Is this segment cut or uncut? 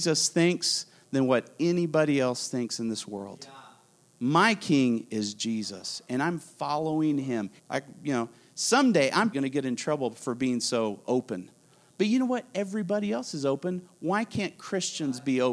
cut